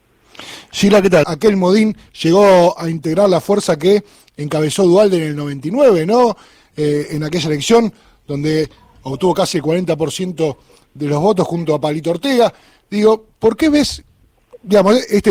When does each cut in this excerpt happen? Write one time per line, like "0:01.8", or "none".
0:01.2